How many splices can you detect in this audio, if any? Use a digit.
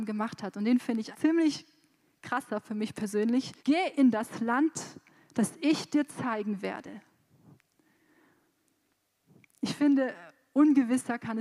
2